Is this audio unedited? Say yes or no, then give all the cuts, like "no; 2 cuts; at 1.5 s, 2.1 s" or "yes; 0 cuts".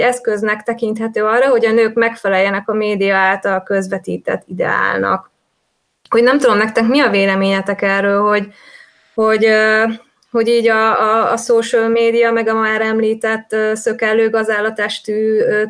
yes; 0 cuts